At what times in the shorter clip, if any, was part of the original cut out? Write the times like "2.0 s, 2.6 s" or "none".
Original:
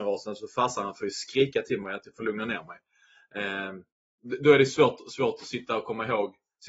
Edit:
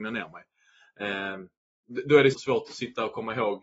2.3 s